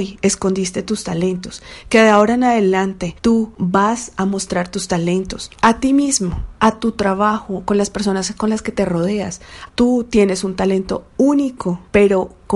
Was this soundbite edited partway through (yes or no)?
yes